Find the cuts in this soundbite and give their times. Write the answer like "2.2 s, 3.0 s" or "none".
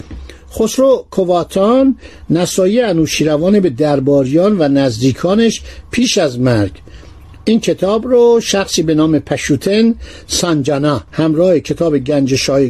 11.1 s